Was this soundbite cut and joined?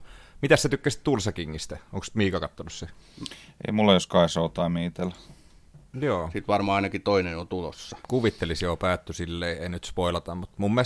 yes; 1 cut; at 5.9 s

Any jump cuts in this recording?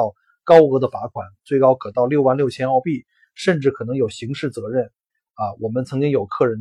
no; 0 cuts

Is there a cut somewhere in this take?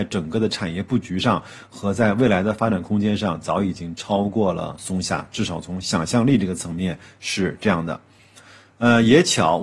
no; 0 cuts

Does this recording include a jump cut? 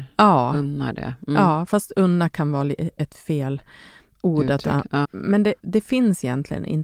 yes; 1 cut; at 5.0 s

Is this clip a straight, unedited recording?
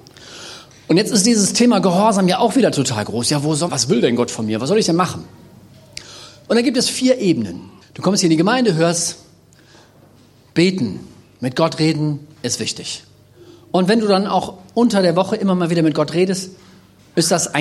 no; 2 cuts; at 3.7 s, 7.8 s

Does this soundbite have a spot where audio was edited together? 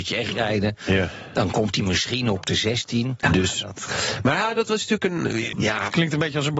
yes; 2 cuts; at 3.2 s, 5.5 s

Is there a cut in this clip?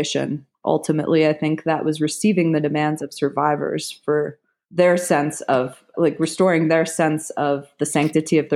yes; 1 cut; at 5.9 s

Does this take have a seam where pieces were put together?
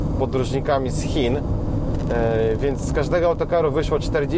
no; 0 cuts

